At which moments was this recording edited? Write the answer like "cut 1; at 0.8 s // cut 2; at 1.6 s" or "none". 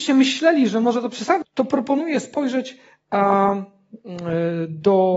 cut 1; at 1.4 s

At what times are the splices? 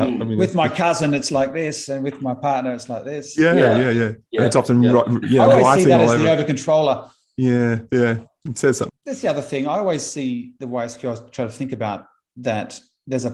cut 1; at 8.9 s

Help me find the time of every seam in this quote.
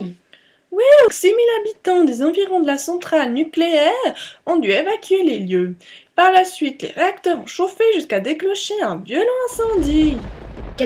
cut 1; at 1.1 s // cut 2; at 6.1 s

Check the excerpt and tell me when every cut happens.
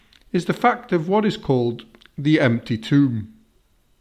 none

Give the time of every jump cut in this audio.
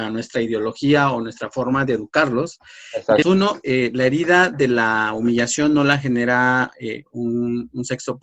cut 1; at 3.2 s

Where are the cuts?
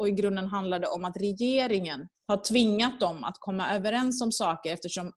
cut 1; at 2.2 s

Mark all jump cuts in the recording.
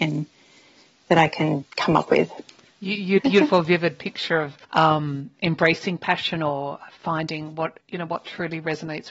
cut 1; at 3.2 s // cut 2; at 4.6 s // cut 3; at 7.8 s

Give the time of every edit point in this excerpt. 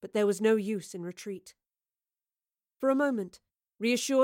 none

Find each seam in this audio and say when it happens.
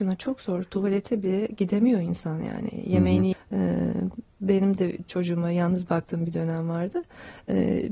cut 1; at 3.3 s

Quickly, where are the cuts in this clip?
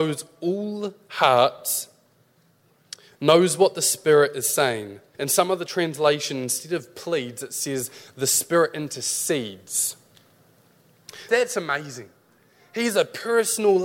cut 1; at 5.1 s // cut 2; at 11.3 s

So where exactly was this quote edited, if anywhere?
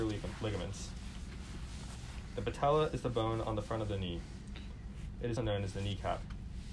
cut 1; at 5.4 s

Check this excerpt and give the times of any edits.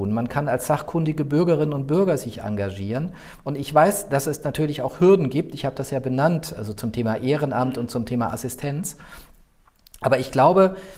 none

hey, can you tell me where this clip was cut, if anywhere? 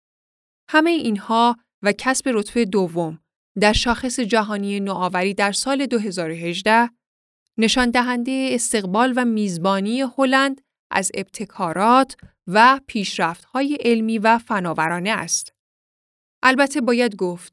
none

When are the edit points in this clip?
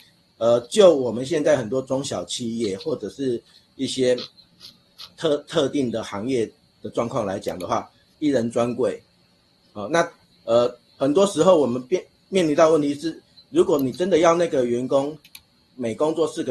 cut 1; at 8.1 s

